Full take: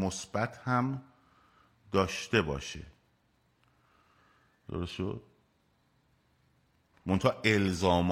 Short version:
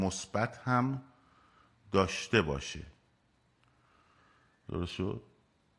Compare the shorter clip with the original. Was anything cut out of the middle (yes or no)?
no